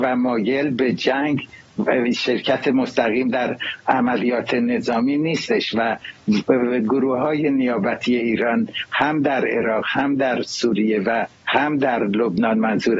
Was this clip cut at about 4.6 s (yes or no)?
no